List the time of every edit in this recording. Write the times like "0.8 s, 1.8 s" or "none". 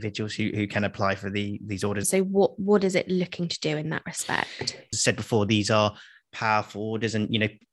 2.0 s, 4.9 s